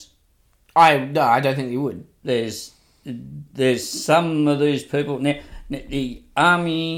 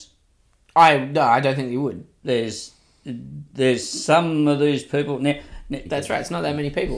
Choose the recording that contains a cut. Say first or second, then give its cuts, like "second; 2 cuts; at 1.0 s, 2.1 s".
second; 1 cut; at 5.9 s